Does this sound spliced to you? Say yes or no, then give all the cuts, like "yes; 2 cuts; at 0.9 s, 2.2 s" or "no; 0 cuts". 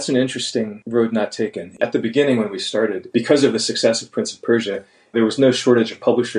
no; 0 cuts